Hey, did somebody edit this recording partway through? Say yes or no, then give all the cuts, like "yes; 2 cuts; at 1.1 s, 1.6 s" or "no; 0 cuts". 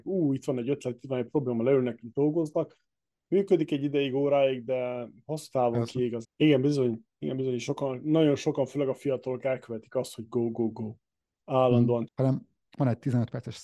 yes; 2 cuts; at 6.2 s, 12.1 s